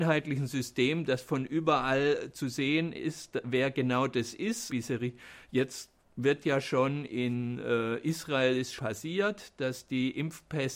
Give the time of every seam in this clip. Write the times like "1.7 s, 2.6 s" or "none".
4.7 s, 8.8 s